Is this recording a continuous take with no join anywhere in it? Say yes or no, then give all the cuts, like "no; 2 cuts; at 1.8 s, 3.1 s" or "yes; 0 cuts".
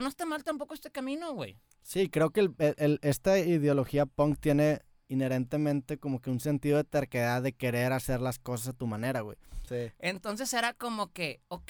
no; 1 cut; at 9.7 s